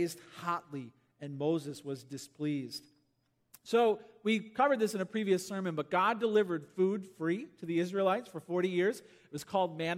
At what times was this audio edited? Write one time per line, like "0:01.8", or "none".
none